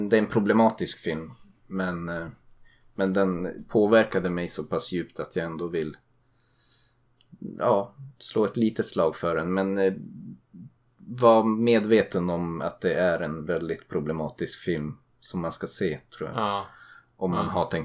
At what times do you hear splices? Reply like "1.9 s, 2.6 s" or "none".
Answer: none